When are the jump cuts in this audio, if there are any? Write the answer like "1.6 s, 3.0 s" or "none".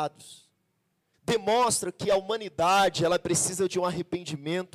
1.1 s